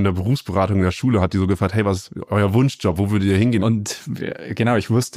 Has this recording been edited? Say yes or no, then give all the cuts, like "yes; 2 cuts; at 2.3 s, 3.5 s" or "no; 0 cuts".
yes; 1 cut; at 3.6 s